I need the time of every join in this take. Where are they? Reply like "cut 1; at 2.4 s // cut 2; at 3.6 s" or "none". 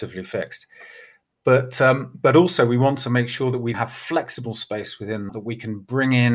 cut 1; at 3.7 s // cut 2; at 5.3 s